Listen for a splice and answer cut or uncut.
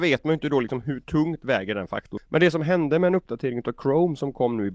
cut